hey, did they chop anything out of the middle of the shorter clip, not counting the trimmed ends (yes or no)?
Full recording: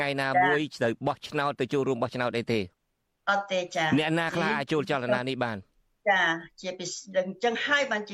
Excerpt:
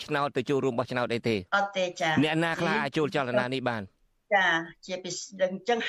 yes